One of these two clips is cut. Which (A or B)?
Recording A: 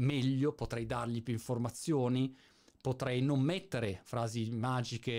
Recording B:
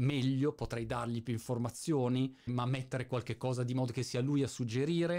B